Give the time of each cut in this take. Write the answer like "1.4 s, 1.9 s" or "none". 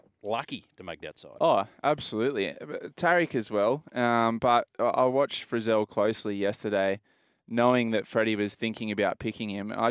none